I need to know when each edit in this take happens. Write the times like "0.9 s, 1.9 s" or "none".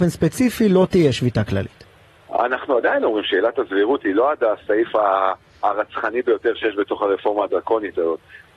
none